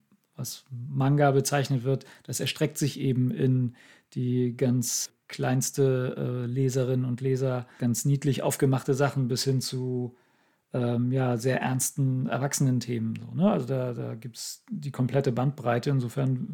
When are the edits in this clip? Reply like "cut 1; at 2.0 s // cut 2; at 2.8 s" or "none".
none